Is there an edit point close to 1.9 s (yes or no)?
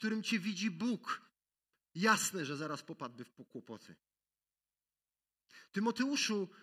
yes